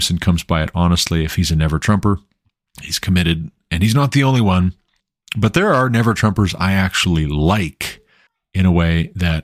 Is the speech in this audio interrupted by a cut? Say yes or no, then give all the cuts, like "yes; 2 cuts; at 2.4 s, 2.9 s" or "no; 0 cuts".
no; 0 cuts